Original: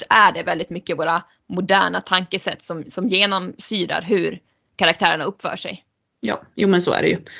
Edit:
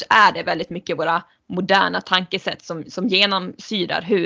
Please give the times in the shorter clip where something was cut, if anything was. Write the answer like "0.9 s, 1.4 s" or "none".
none